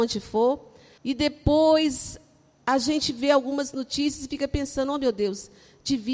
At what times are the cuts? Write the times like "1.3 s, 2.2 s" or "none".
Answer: 1.0 s